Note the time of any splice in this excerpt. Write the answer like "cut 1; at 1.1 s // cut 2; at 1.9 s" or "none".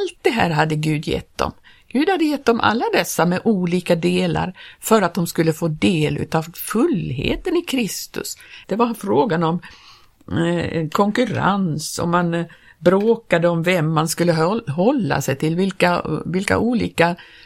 cut 1; at 8.6 s